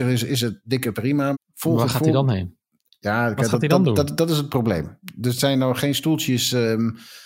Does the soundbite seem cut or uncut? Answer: cut